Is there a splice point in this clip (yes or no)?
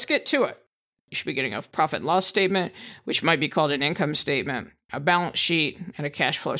yes